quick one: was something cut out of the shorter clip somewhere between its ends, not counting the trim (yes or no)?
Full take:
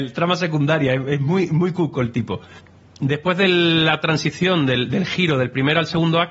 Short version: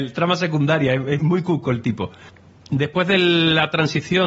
yes